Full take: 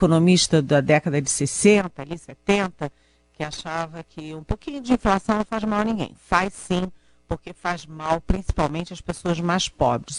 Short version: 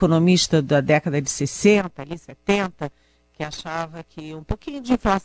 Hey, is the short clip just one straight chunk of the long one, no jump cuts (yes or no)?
yes